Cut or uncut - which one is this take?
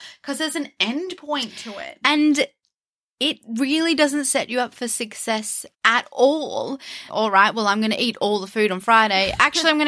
cut